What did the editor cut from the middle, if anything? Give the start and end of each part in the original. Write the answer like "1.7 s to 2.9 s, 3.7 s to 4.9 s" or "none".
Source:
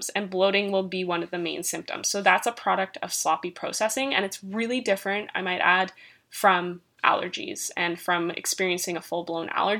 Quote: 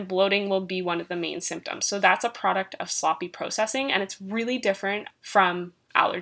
5.3 s to 6.2 s